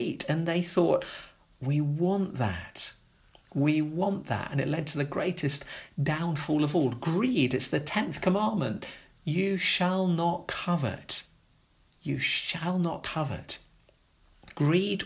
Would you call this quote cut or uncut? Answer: uncut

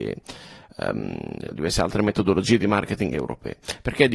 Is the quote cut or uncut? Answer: cut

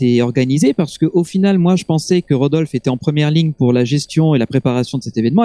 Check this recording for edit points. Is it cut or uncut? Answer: uncut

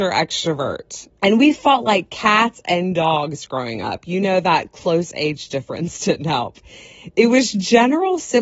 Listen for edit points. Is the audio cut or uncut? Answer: cut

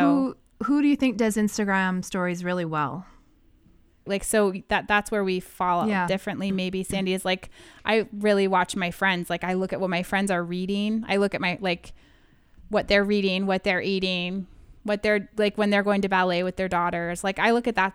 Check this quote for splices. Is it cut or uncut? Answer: cut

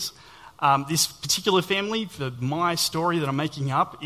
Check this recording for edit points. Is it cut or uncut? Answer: uncut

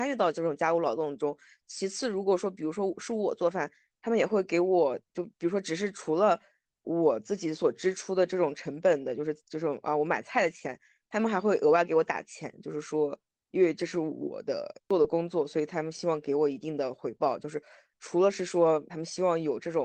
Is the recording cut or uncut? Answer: cut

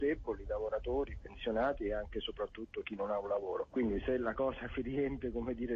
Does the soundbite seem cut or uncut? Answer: uncut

